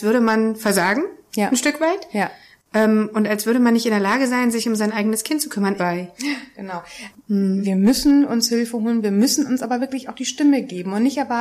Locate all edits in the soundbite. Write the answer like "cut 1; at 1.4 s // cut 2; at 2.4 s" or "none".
cut 1; at 5.8 s // cut 2; at 7.1 s